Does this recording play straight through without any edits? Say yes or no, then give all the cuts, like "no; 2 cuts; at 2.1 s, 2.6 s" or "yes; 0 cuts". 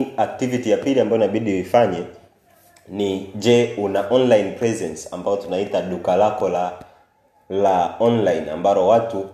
yes; 0 cuts